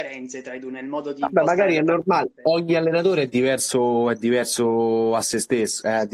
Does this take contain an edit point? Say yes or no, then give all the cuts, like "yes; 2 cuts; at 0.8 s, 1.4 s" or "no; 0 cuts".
no; 0 cuts